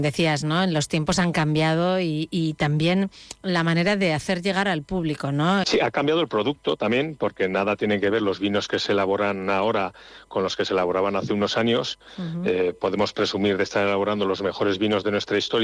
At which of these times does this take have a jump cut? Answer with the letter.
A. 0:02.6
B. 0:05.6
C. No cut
B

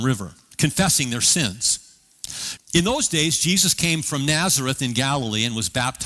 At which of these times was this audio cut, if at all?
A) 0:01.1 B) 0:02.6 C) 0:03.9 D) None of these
B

